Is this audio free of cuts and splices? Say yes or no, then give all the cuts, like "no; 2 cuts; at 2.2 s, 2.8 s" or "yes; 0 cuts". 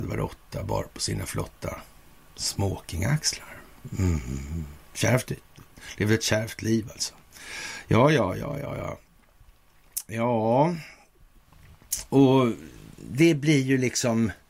yes; 0 cuts